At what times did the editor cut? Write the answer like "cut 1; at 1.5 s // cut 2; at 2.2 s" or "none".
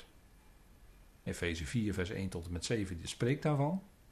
cut 1; at 1.3 s